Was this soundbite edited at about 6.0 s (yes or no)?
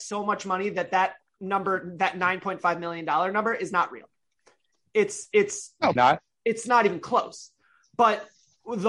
yes